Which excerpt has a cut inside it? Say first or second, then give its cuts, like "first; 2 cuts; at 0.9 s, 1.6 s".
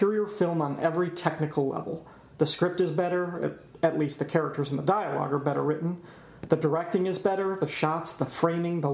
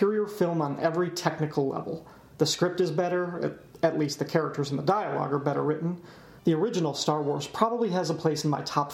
second; 1 cut; at 6.4 s